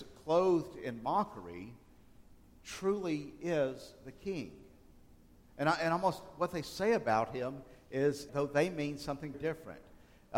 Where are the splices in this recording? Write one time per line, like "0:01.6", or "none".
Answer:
0:08.3
0:09.3